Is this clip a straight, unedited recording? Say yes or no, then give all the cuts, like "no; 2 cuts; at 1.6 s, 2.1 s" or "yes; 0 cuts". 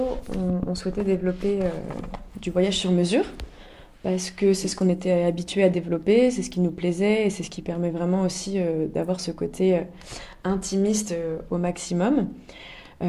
yes; 0 cuts